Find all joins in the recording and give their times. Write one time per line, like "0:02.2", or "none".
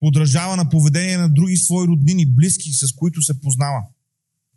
none